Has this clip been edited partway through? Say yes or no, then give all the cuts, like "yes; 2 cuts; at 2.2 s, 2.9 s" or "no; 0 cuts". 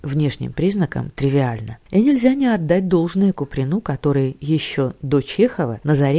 no; 0 cuts